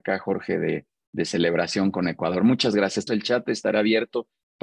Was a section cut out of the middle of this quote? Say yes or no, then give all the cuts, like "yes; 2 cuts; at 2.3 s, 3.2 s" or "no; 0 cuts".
yes; 1 cut; at 3.1 s